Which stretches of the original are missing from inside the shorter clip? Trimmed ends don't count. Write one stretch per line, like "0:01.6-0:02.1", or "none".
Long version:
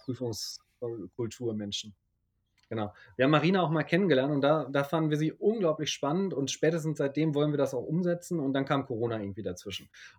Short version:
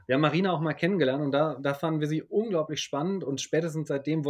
none